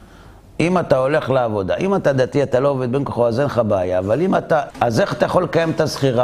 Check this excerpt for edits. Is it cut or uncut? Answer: cut